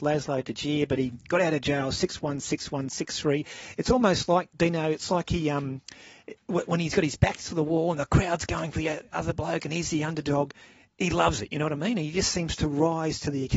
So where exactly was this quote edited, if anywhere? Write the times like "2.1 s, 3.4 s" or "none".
none

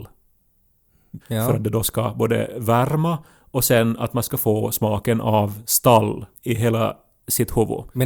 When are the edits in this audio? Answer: 1.2 s, 6.3 s

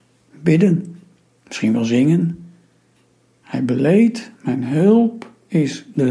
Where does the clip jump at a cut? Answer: none

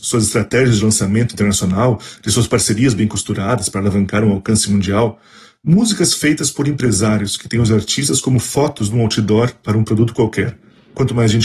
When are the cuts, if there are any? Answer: none

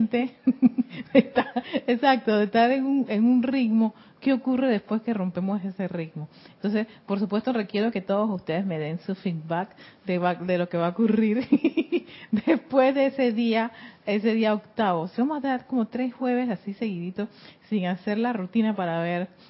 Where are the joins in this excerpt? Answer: none

